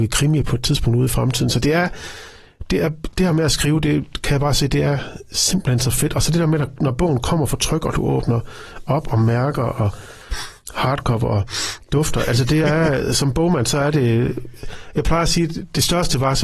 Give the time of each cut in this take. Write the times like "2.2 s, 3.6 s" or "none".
none